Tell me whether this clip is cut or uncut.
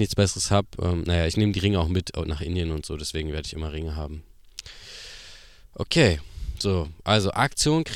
uncut